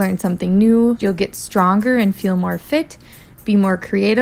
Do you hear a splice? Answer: yes; 1 cut; at 1.0 s

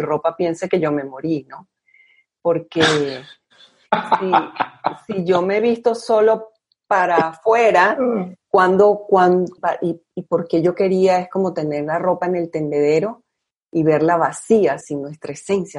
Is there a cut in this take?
yes; 2 cuts; at 9.6 s, 14.8 s

